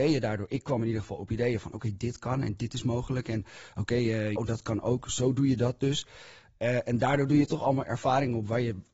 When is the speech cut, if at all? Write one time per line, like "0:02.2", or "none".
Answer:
0:04.4